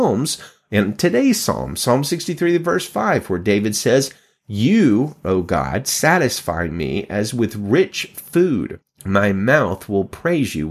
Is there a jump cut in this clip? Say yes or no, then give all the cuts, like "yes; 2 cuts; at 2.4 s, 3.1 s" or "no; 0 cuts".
no; 0 cuts